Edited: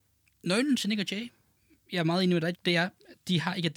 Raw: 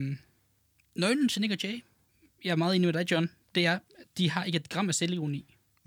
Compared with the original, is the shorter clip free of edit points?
no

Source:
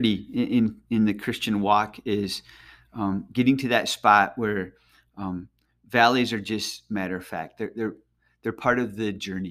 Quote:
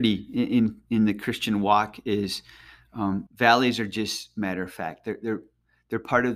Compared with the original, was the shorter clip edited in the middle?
yes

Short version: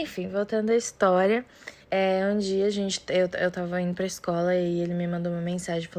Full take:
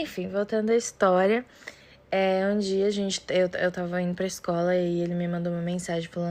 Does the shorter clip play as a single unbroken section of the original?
no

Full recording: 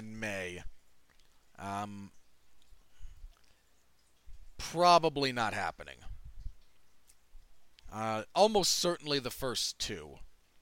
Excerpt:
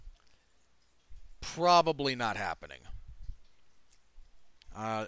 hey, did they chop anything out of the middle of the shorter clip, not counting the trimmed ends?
no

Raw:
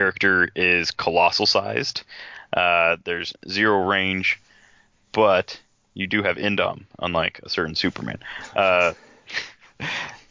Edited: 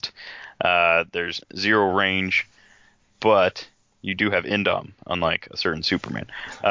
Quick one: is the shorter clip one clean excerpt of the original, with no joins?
yes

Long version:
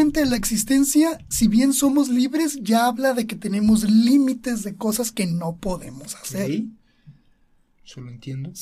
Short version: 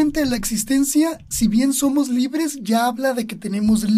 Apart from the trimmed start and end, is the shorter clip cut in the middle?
no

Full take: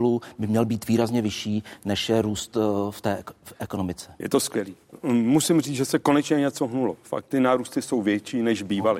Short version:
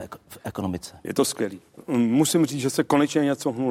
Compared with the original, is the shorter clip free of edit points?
yes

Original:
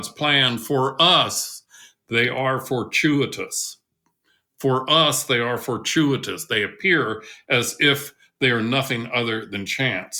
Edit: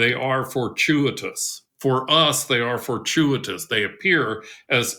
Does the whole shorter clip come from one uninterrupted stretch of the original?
no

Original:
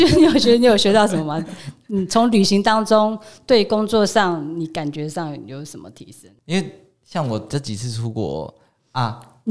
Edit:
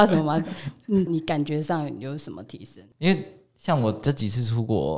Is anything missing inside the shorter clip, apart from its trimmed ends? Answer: yes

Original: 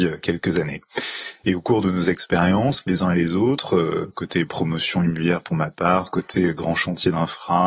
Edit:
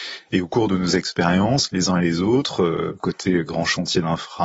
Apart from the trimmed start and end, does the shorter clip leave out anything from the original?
yes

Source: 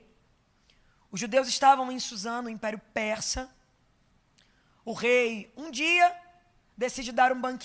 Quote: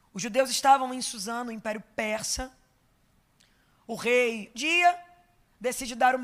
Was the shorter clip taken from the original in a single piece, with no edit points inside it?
no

